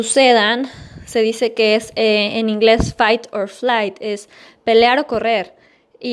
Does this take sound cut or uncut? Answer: uncut